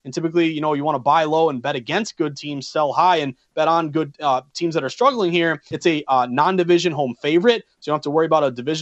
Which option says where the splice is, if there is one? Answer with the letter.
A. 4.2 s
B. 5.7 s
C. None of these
B